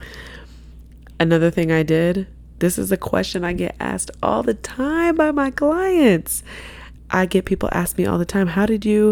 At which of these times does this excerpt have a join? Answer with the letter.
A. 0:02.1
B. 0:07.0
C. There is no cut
B